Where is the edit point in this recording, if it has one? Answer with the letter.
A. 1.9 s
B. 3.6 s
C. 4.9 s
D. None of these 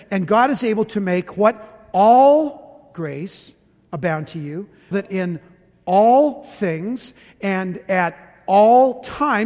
C